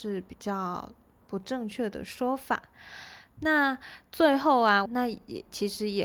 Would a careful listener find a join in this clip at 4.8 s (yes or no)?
yes